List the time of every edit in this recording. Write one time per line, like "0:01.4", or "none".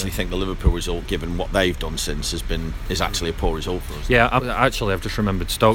0:04.4